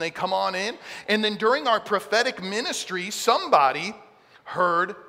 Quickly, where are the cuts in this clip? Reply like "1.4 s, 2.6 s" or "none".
none